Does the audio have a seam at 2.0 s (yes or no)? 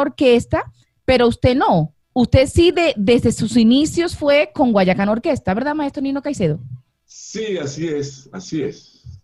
yes